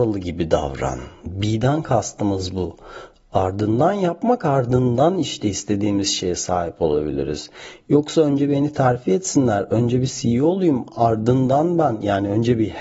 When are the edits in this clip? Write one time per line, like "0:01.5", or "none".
0:01.3

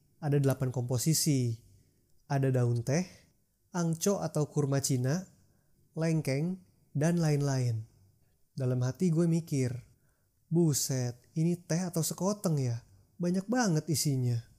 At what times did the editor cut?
0:05.7

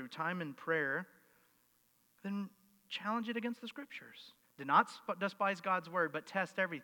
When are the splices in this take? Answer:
0:04.4

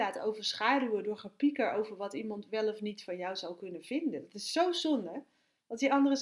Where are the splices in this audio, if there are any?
none

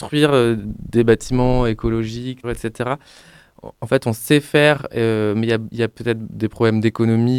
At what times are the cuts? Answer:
0:02.4

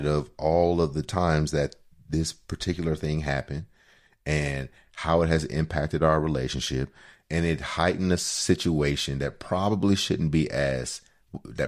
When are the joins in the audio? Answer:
none

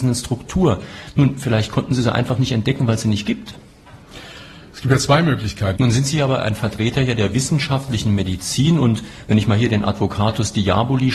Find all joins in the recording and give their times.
0:05.7

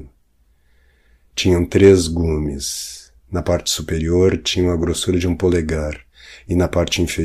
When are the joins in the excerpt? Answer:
none

